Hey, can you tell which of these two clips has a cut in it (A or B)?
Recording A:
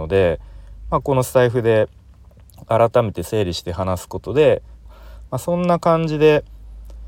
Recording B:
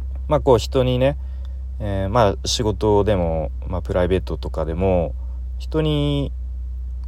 A